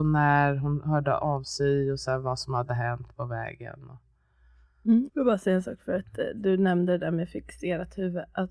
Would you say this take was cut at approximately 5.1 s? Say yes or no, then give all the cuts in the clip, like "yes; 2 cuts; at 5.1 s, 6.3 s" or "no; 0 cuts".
yes; 1 cut; at 5.1 s